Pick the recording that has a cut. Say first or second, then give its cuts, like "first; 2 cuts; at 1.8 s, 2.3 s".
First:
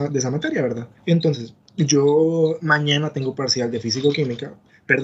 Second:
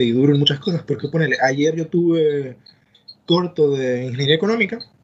first; 1 cut; at 1.0 s